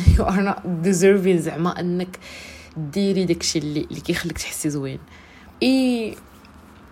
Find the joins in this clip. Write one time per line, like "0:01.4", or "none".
0:05.5